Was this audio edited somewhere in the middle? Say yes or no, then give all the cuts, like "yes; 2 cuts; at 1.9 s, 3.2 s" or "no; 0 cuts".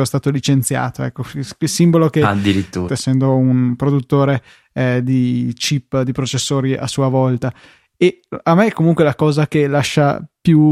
yes; 1 cut; at 2.9 s